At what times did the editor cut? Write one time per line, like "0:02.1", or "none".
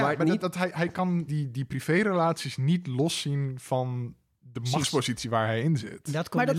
0:01.3